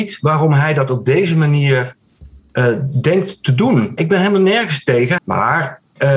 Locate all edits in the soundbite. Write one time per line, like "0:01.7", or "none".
0:04.0
0:05.2